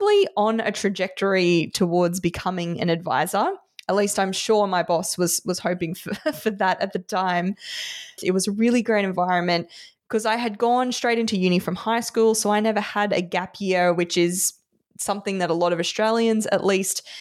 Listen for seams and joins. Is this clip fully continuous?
no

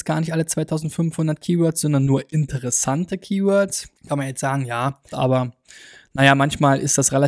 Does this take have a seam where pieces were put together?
yes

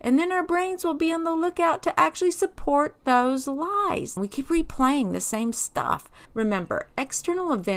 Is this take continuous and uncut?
no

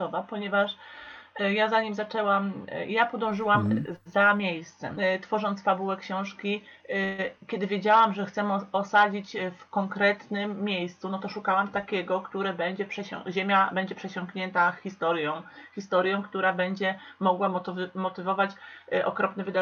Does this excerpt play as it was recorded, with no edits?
yes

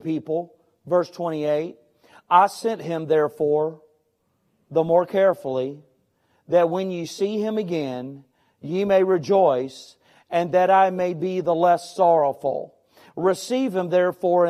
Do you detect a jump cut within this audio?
no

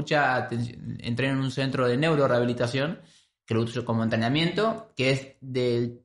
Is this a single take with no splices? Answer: yes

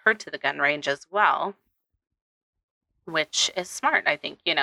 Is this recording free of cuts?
yes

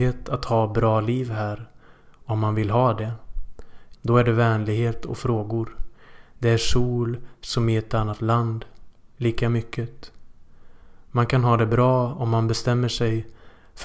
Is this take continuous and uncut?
no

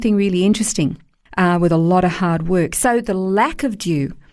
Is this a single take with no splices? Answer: no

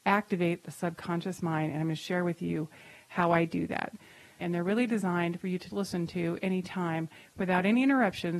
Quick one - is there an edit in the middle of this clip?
yes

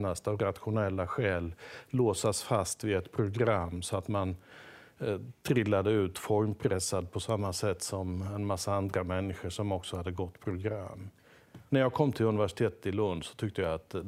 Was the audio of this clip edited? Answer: yes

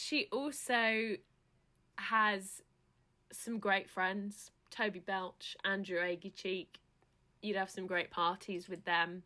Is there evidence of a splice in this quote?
no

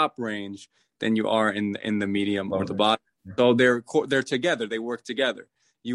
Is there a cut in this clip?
no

